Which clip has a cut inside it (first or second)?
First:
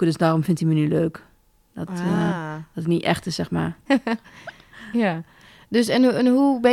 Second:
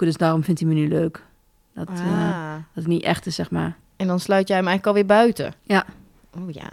first